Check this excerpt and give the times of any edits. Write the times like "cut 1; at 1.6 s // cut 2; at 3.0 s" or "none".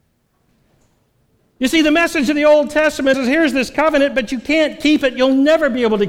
cut 1; at 3.1 s